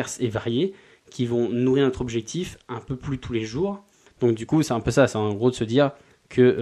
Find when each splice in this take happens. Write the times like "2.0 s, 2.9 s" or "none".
4.1 s